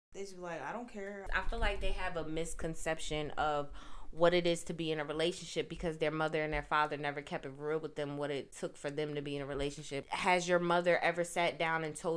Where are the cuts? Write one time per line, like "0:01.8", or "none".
0:01.3
0:10.0